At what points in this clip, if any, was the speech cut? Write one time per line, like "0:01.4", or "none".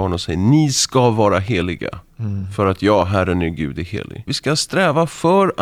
0:04.3